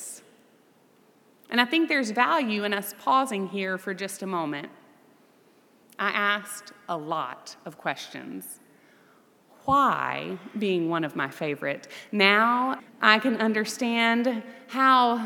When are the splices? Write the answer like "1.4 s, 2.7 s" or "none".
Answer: 5.8 s, 12.8 s